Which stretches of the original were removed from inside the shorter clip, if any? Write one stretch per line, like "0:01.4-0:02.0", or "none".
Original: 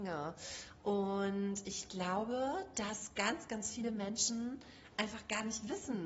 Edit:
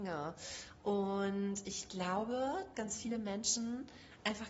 0:02.7-0:03.5